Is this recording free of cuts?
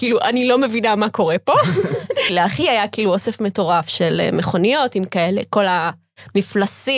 no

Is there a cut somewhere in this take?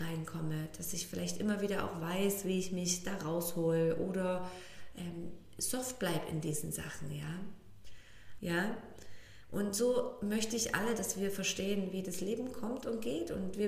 yes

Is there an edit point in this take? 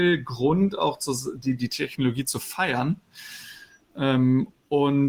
yes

